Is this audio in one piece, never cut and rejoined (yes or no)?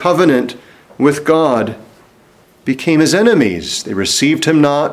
yes